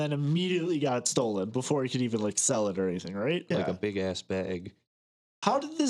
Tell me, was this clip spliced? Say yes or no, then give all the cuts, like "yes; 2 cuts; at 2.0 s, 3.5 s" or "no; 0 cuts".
yes; 1 cut; at 3.5 s